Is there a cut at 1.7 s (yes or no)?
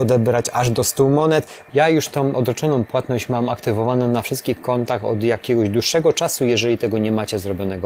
yes